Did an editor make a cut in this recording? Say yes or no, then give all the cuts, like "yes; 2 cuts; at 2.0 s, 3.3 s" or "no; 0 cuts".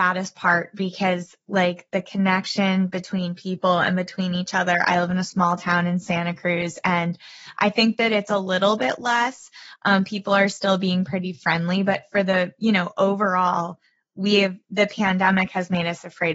no; 0 cuts